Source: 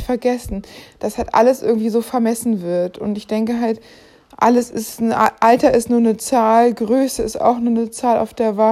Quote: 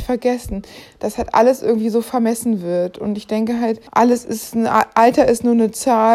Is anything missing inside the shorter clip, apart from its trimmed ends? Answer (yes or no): yes